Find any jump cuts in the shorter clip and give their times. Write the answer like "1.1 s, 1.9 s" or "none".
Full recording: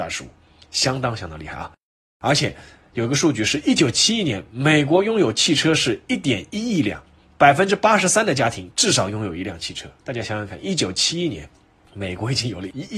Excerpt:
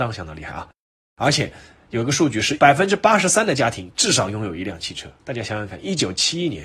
2.6 s